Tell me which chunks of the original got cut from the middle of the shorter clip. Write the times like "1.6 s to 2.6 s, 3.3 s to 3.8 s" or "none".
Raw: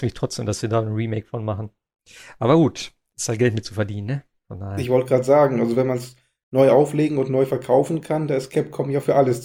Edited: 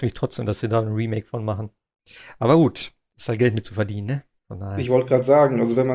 none